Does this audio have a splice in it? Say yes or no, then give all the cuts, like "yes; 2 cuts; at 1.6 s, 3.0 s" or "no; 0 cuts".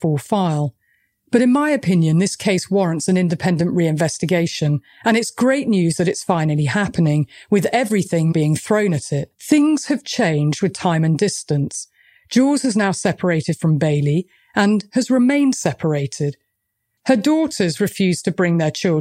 yes; 2 cuts; at 8.3 s, 9.3 s